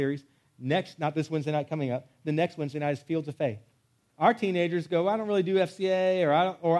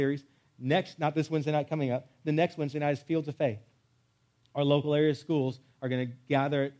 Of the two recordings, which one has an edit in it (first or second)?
first